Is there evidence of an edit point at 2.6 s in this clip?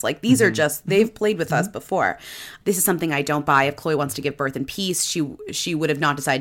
yes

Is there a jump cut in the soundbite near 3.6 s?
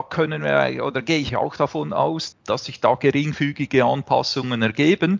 no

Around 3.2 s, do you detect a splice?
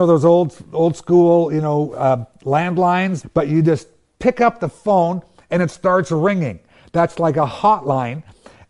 yes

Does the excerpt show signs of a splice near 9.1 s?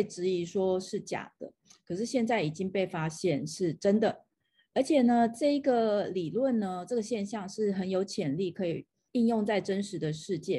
yes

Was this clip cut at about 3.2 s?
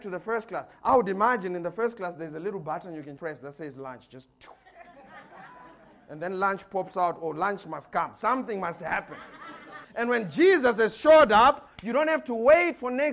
yes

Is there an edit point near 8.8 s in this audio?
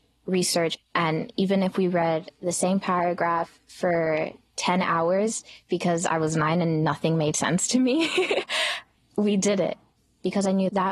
no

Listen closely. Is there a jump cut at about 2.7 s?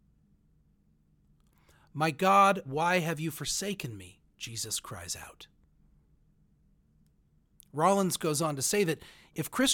yes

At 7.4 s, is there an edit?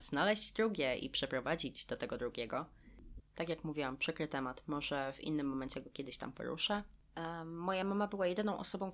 no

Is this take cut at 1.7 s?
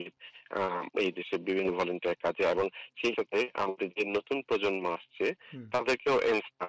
no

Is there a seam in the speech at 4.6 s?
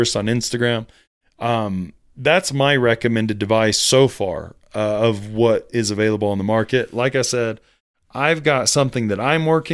no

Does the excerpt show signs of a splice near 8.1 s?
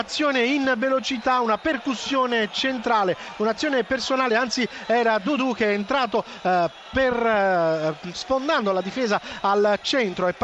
yes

